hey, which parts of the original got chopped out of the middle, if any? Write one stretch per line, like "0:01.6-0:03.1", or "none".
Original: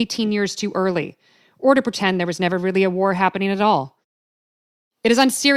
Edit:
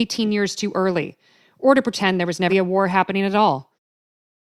0:02.5-0:02.8

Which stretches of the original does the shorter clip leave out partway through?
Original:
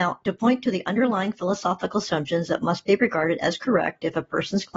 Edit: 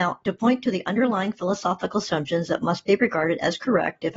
none

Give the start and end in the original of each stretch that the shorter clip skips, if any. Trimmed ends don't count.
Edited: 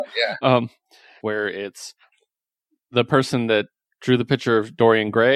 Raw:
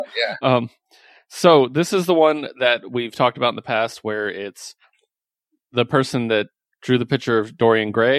0:01.2-0:04.0

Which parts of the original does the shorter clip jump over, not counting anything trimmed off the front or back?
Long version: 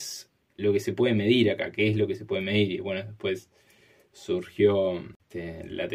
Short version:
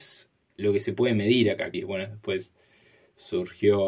0:01.7-0:02.7

